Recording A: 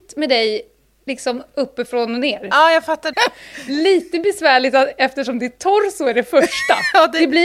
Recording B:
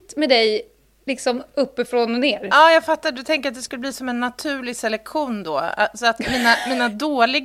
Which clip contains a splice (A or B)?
A